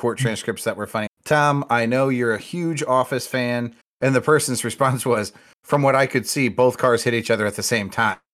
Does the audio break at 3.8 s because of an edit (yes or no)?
yes